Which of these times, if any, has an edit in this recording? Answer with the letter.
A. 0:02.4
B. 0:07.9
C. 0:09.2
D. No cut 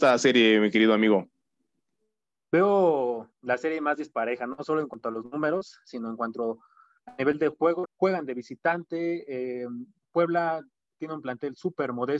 B